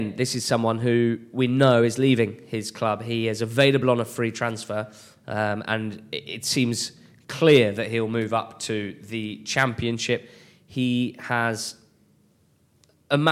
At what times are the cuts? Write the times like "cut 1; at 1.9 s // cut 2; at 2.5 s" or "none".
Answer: none